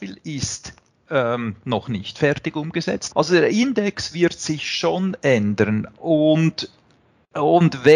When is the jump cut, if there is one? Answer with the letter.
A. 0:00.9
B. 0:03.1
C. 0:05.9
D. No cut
B